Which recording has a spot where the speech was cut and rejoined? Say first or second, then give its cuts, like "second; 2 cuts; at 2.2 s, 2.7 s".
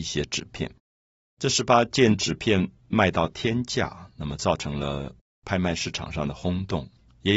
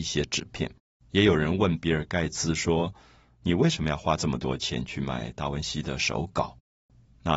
second; 1 cut; at 1.0 s